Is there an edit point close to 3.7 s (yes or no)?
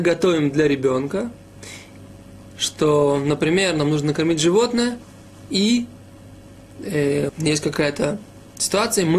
no